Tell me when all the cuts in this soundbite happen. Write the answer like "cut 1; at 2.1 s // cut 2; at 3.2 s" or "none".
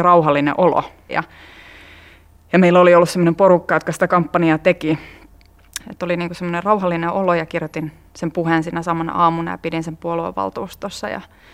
cut 1; at 1.1 s // cut 2; at 5.8 s